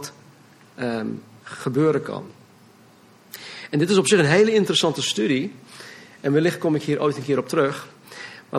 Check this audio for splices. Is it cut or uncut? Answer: uncut